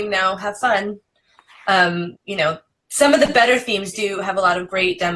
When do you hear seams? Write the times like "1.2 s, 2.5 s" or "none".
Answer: 2.1 s, 3.9 s